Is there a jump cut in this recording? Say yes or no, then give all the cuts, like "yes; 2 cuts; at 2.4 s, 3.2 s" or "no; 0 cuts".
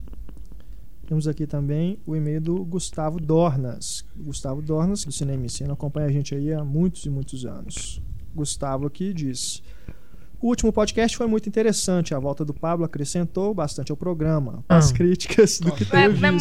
yes; 2 cuts; at 5.0 s, 14.7 s